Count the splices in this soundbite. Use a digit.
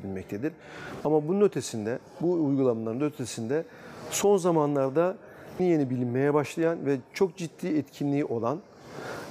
2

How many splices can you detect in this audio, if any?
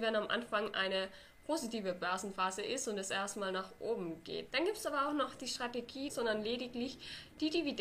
2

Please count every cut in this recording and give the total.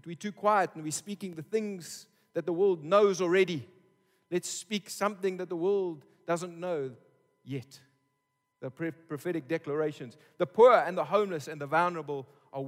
0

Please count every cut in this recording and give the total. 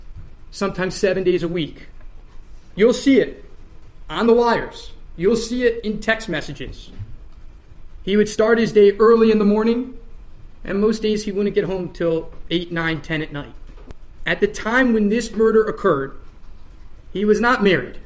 0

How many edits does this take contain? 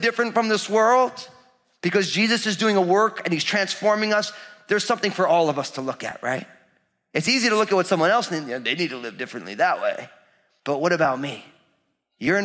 0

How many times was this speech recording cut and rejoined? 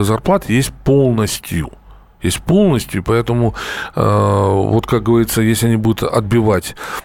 0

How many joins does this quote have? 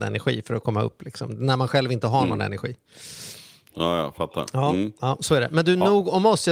0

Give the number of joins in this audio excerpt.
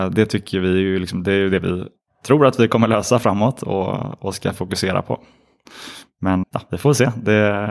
1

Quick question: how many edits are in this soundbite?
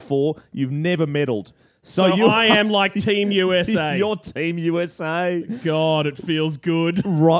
0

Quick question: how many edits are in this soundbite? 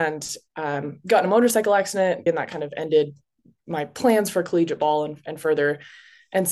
1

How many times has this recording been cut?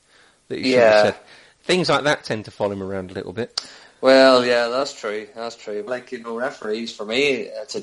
1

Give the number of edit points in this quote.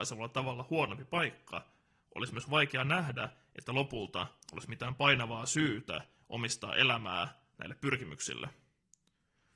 0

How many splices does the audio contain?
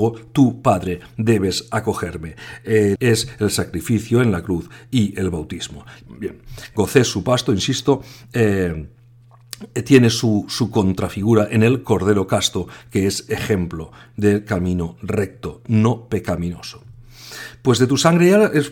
2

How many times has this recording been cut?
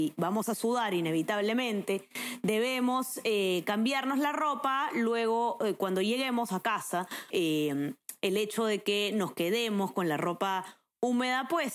1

